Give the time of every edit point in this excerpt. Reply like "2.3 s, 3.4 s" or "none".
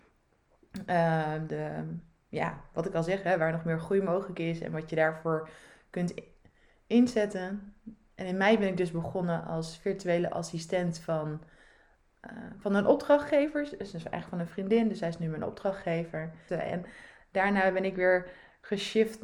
16.5 s